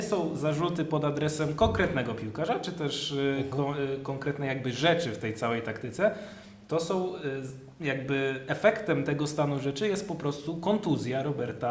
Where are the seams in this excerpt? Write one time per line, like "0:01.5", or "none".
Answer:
none